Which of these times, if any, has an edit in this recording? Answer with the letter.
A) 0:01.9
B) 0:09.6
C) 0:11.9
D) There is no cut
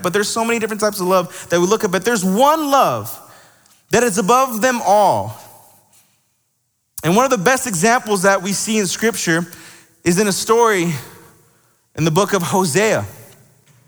D